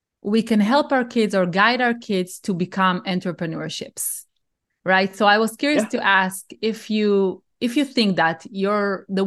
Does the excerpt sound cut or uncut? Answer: uncut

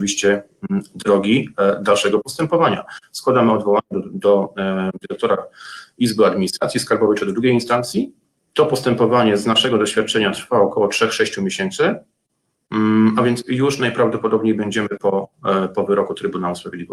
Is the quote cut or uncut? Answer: uncut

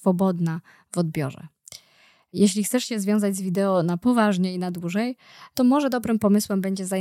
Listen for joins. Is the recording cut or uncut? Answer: uncut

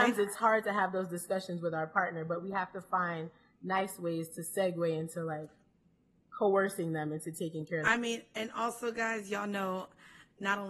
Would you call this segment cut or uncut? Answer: uncut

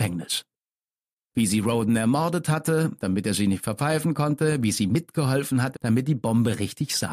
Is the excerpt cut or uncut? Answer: cut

